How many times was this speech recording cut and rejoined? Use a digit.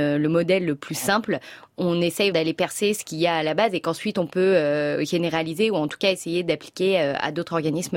1